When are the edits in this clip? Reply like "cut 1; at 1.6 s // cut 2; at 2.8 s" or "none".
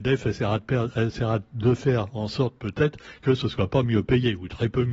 none